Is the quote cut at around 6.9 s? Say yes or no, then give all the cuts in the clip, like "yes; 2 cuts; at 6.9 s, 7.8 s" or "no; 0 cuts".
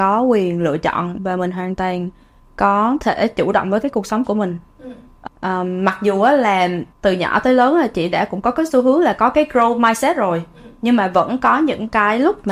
yes; 2 cuts; at 5.3 s, 6.9 s